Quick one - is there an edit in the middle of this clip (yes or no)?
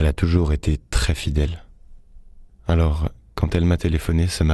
yes